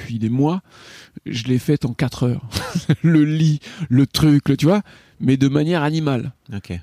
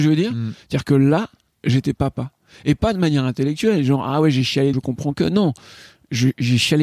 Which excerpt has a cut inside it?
second; 1 cut; at 4.7 s

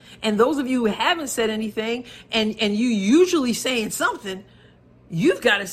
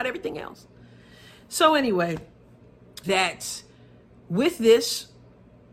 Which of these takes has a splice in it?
second; 1 cut; at 3.0 s

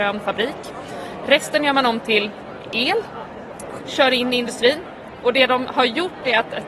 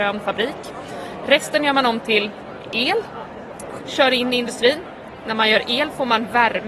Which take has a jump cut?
first; 1 cut; at 5.2 s

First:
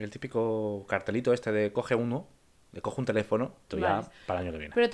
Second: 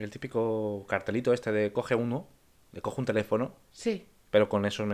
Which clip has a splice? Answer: first; 1 cut; at 3.7 s

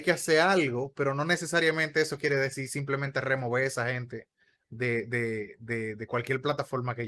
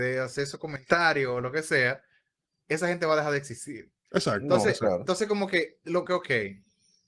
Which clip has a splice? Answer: second; 2 cuts; at 4.0 s, 6.1 s

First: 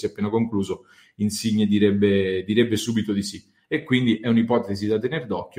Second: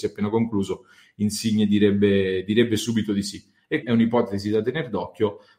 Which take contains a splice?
second; 1 cut; at 3.8 s

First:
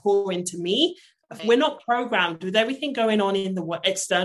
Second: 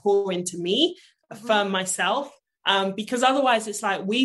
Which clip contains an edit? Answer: first; 1 cut; at 1.4 s

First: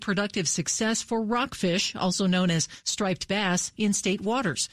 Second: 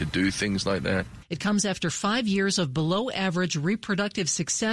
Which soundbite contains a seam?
second; 1 cut; at 1.2 s

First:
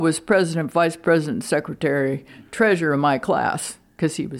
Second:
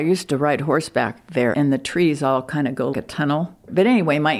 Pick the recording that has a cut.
second; 2 cuts; at 1.5 s, 2.9 s

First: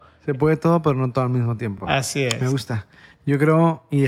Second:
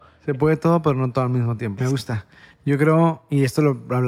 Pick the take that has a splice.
second; 1 cut; at 1.8 s

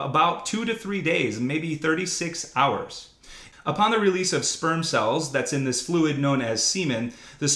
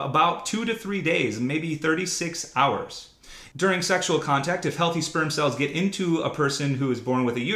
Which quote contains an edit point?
first; 1 cut; at 3.5 s

